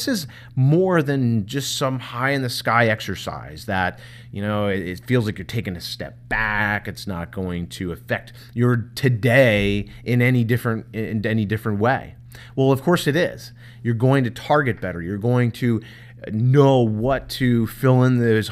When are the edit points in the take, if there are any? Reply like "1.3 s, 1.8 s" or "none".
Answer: none